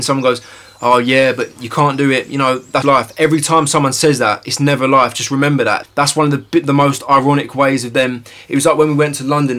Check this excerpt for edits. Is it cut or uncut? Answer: cut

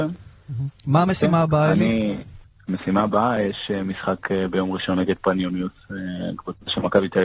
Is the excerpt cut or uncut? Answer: uncut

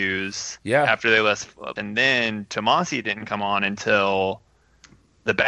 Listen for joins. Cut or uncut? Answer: cut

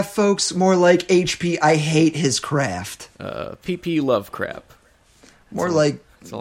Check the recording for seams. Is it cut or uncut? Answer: cut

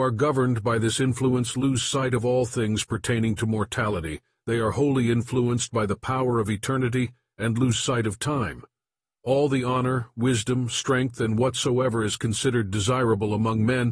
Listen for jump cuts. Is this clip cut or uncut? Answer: uncut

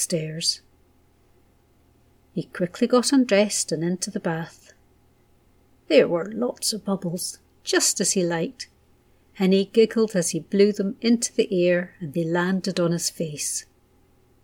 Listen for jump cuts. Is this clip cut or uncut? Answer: uncut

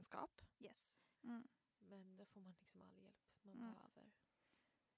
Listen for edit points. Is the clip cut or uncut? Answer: cut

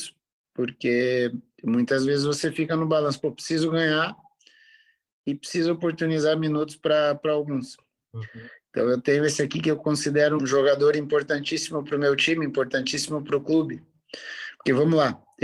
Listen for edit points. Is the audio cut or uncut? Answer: cut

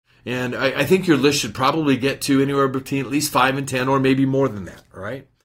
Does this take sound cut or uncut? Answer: uncut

